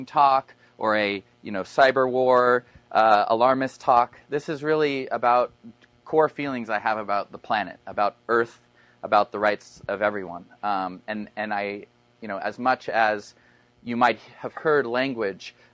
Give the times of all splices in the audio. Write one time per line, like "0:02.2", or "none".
none